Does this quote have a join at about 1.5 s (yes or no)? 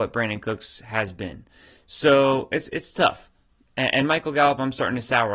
no